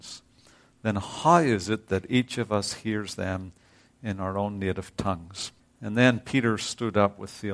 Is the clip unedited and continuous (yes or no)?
no